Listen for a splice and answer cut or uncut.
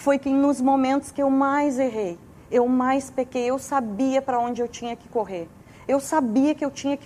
uncut